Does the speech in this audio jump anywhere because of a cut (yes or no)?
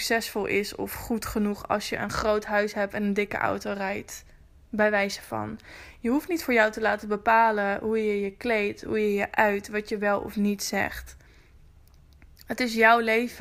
no